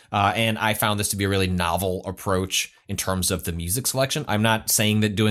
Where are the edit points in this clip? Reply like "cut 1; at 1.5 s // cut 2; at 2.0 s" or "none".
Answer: cut 1; at 4.3 s